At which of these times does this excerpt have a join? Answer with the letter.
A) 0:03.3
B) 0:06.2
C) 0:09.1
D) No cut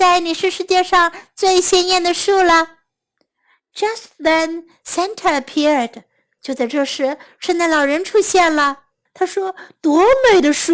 C